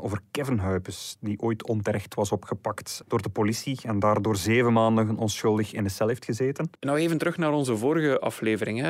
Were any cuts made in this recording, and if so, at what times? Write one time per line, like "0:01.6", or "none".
0:03.0
0:06.8